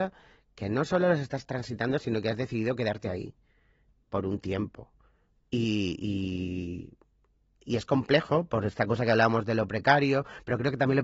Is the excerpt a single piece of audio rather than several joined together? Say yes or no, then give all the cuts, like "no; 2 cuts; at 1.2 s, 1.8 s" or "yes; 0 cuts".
no; 1 cut; at 5.4 s